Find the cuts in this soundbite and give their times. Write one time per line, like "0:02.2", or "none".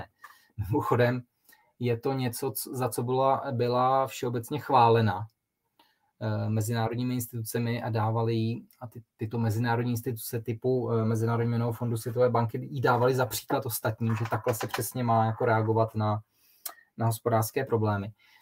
none